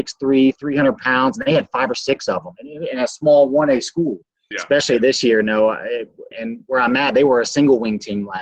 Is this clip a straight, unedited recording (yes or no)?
no